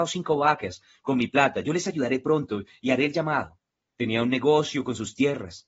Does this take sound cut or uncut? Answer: cut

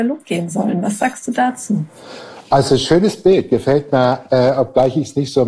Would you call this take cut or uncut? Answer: cut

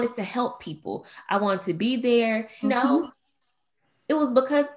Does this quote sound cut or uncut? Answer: cut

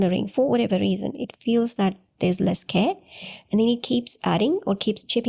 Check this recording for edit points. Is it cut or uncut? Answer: uncut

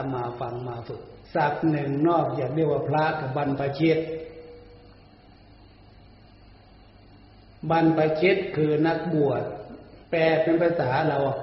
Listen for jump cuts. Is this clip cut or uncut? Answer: cut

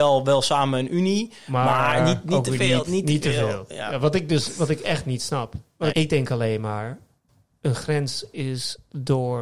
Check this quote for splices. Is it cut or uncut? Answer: cut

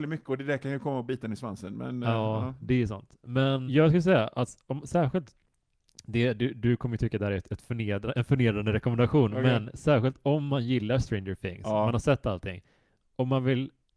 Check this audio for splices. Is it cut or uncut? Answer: cut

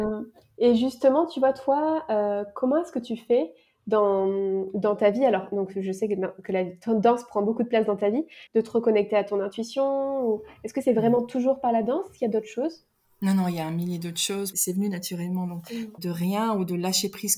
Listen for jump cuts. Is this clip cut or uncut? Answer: cut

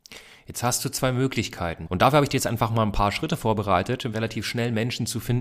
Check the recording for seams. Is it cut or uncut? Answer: cut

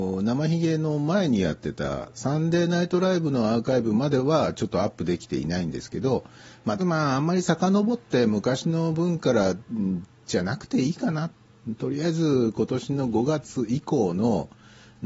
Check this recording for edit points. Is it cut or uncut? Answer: cut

